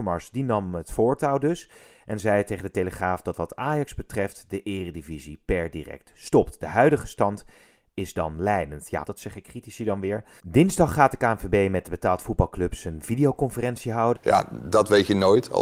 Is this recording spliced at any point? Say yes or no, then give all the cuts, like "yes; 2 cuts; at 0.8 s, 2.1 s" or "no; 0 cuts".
yes; 3 cuts; at 9.0 s, 10.4 s, 14.2 s